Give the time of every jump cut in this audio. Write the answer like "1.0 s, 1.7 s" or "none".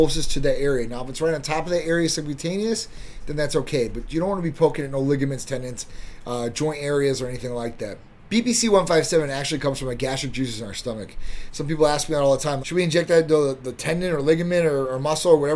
8.3 s, 11.5 s, 12.6 s